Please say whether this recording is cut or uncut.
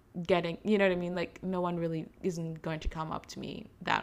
uncut